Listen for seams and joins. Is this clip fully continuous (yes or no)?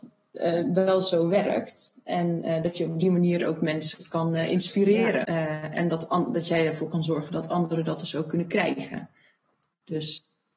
no